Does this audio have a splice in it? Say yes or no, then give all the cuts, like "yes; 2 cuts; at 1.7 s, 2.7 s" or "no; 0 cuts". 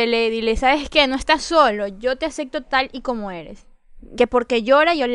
yes; 1 cut; at 4.1 s